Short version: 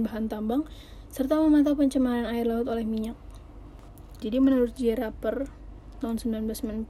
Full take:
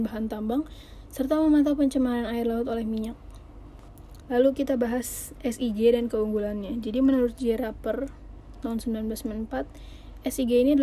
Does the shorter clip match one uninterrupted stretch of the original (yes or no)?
no